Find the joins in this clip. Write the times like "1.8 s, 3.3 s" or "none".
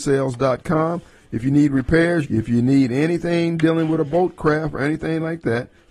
2.2 s, 4.7 s